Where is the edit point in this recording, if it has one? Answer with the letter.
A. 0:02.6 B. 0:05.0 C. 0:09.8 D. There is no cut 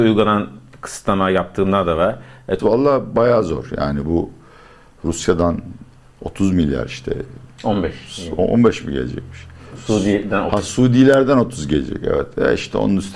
A